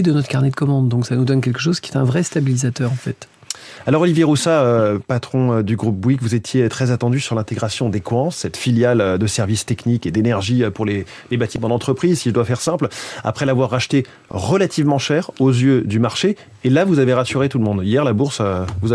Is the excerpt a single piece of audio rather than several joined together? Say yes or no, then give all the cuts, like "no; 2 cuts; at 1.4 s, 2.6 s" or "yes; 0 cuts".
yes; 0 cuts